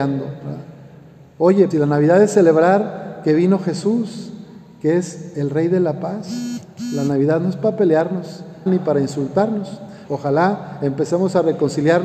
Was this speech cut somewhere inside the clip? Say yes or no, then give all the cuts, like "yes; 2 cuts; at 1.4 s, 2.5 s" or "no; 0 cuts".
yes; 3 cuts; at 1.7 s, 8.7 s, 10.0 s